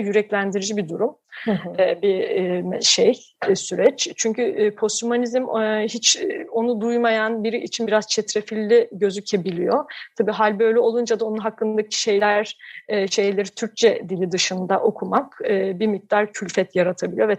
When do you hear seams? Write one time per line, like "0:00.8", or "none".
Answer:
none